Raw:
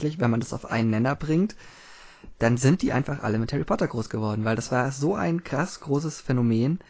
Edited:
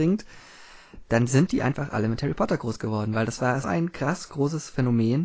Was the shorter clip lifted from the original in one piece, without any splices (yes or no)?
no